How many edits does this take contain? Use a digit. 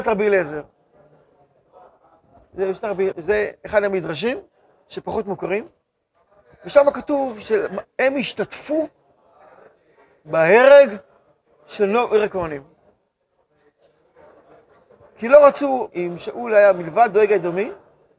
3